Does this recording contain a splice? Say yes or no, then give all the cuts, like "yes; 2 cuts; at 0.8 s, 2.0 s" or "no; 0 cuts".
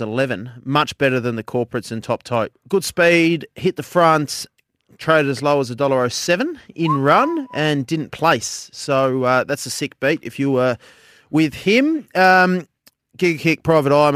yes; 1 cut; at 2.5 s